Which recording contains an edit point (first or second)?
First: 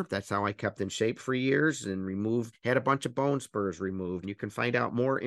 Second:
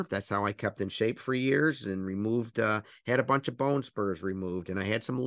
first